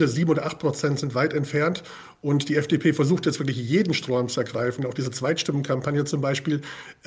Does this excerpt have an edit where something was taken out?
no; 0 cuts

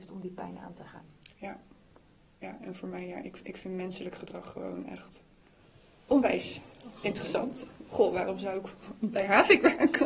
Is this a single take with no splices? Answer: yes; 0 cuts

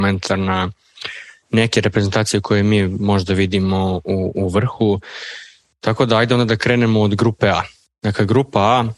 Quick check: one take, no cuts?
yes; 0 cuts

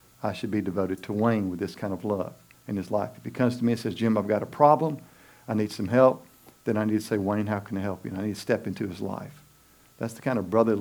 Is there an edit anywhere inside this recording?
no; 0 cuts

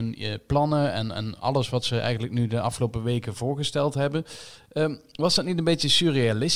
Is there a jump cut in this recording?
no; 0 cuts

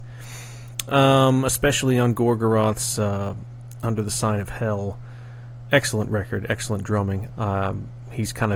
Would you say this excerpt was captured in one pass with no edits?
no; 1 cut; at 7.3 s

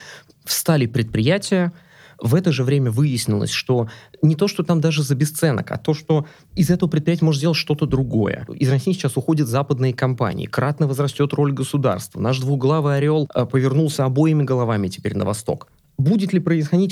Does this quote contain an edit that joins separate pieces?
no; 0 cuts

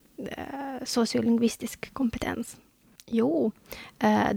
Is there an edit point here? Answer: yes; 1 cut; at 3.0 s

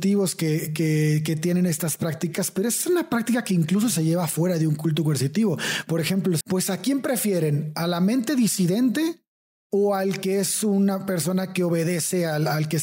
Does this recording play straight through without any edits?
no; 1 cut; at 6.4 s

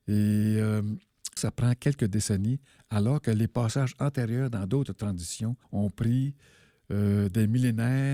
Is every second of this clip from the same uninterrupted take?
no; 2 cuts; at 1.4 s, 5.6 s

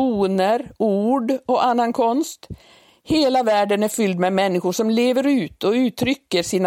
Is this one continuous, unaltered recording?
yes; 0 cuts

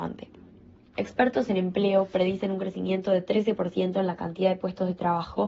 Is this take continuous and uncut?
no; 1 cut; at 0.9 s

